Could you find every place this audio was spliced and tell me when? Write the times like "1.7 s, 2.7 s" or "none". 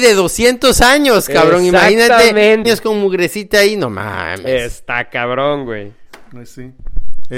2.6 s